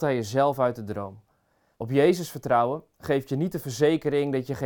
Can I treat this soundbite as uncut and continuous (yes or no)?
no